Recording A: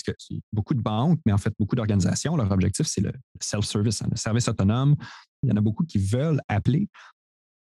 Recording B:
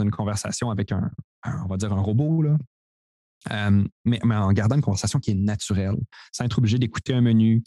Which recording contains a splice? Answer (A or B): A